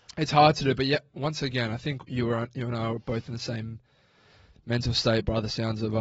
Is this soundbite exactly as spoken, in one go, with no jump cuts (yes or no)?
yes